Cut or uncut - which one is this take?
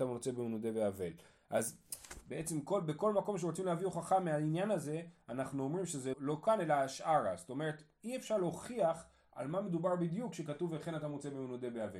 cut